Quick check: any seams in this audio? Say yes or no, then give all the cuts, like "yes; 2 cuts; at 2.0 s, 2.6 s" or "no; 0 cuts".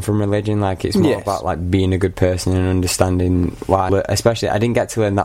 yes; 1 cut; at 3.9 s